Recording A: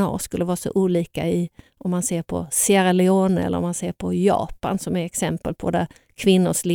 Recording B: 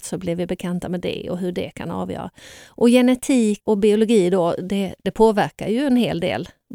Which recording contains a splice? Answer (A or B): B